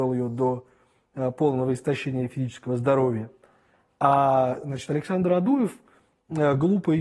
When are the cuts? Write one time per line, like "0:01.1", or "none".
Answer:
none